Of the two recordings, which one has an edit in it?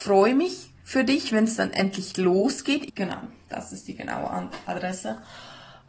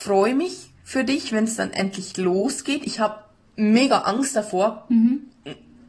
first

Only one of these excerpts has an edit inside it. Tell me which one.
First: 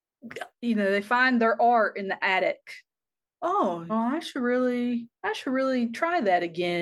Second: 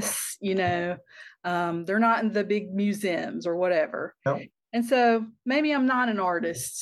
first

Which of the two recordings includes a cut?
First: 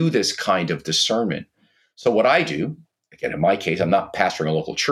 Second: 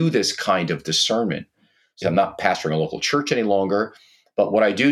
second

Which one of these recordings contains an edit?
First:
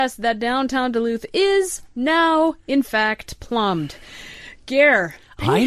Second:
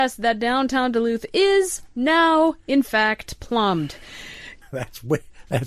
second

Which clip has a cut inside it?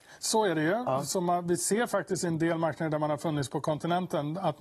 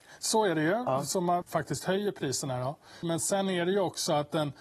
second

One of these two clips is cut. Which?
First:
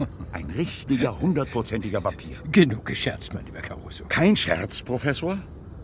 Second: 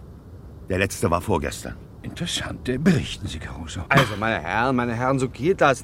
second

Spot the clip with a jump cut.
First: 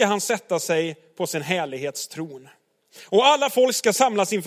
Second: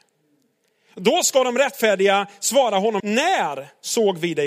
second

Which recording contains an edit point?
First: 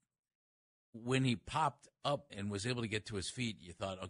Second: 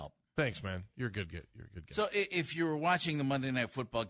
first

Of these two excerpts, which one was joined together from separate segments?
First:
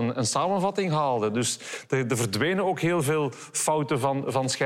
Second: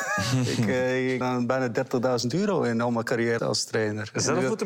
second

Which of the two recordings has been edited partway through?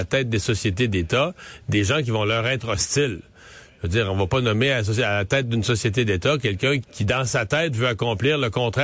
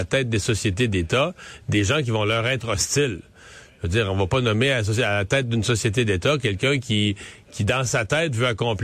first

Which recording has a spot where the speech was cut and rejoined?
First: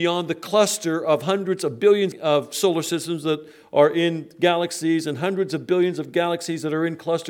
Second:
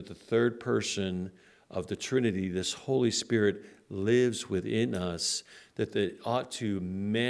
first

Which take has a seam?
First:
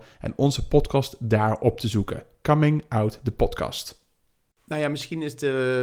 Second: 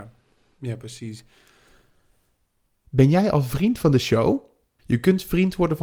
second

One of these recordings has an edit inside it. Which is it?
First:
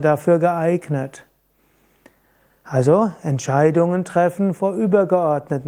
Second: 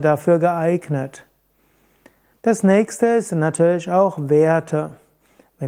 second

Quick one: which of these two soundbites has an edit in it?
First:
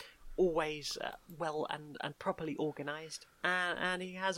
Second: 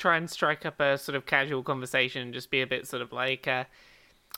first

